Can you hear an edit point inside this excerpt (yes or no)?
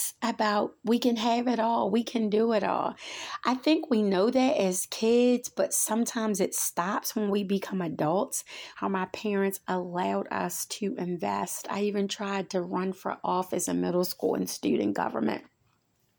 yes